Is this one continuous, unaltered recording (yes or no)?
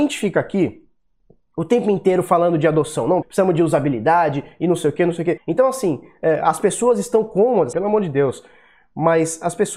no